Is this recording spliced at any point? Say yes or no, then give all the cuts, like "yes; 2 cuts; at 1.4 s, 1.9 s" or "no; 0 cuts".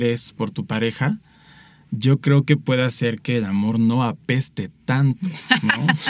no; 0 cuts